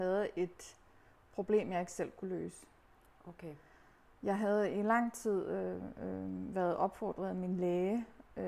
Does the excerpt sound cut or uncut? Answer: uncut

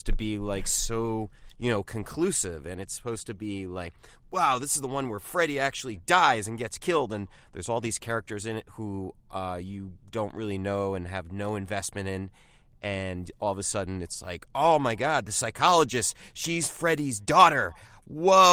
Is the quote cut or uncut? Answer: uncut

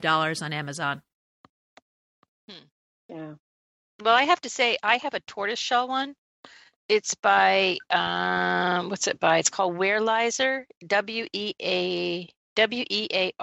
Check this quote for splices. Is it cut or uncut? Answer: uncut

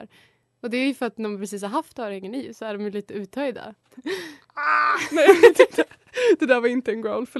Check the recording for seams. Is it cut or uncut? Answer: cut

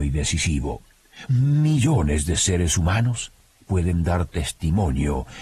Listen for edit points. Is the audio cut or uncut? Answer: cut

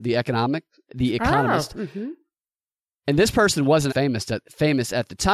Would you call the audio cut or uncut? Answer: cut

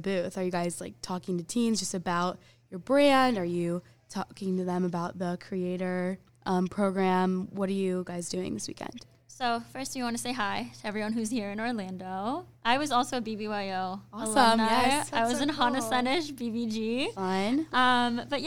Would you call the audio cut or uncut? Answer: uncut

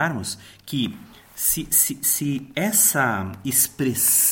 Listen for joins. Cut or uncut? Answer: uncut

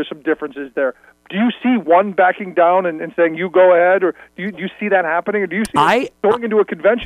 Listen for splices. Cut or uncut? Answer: uncut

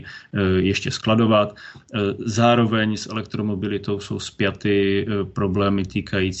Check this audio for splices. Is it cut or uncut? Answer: uncut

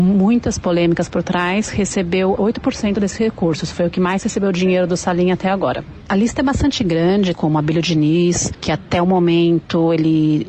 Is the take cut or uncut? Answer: cut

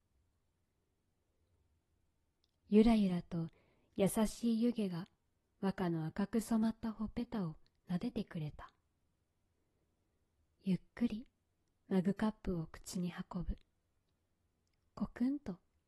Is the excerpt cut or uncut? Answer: uncut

